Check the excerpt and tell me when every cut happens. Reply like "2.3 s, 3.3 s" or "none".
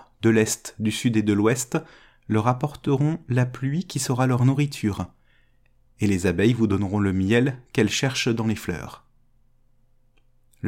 none